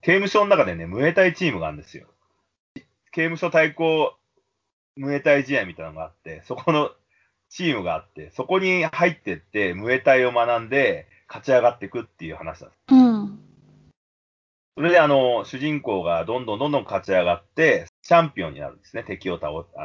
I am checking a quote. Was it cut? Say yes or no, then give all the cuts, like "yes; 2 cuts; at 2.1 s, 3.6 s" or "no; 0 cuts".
yes; 2 cuts; at 12.7 s, 17.9 s